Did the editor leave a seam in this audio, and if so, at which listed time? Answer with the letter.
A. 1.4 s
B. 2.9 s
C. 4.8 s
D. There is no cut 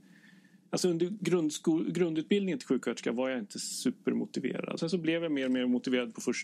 C